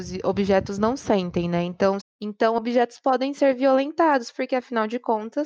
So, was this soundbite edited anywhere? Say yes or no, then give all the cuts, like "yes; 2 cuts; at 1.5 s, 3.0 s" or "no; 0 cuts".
yes; 1 cut; at 2.0 s